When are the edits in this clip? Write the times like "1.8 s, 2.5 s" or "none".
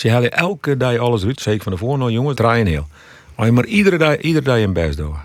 1.3 s, 2.3 s